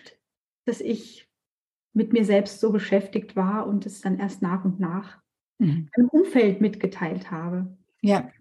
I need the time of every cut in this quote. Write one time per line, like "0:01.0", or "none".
none